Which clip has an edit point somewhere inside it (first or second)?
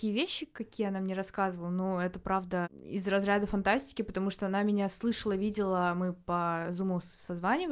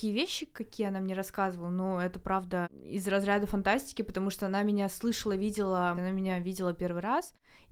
second